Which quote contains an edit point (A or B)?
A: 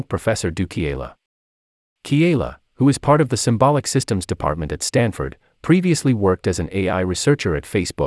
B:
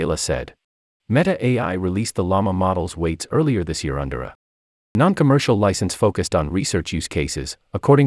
B